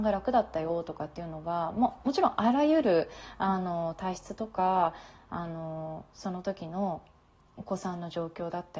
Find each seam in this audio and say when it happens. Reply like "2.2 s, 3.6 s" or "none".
none